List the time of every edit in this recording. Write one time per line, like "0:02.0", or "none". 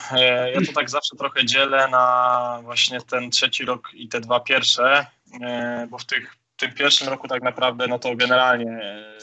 none